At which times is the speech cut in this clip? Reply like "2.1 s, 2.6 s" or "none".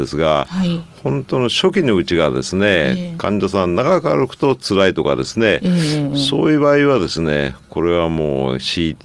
none